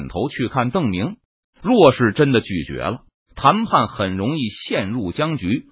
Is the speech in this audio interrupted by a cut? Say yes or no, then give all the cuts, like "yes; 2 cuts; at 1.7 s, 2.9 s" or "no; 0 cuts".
yes; 2 cuts; at 1.4 s, 3.2 s